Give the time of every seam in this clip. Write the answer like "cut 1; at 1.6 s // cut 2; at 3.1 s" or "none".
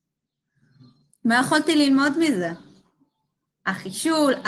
none